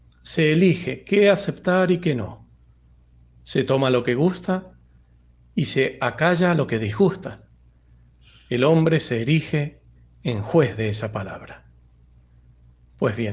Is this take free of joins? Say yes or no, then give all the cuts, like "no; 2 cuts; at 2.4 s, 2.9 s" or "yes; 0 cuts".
yes; 0 cuts